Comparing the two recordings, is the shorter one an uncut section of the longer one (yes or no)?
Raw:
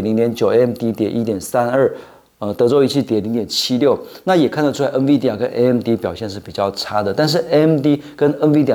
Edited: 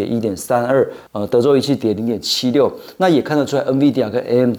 no